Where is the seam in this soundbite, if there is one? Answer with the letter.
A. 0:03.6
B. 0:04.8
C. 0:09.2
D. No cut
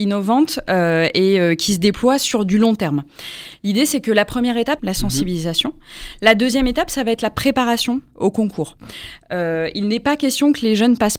B